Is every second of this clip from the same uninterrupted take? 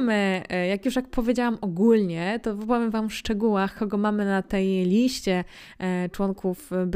yes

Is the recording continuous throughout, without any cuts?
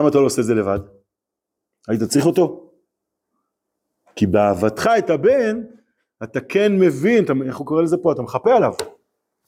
yes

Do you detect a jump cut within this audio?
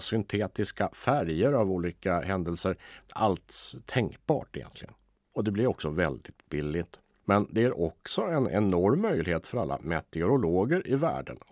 yes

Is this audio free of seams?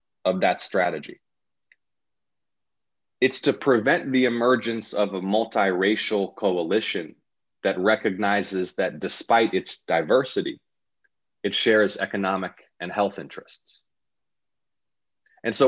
yes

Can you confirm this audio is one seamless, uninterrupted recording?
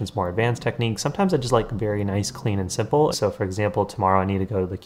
no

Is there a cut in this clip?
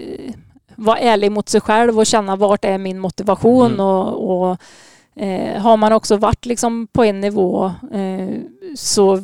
no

